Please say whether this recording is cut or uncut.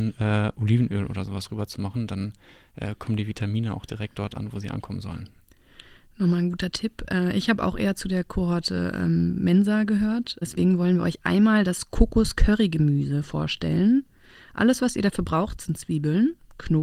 cut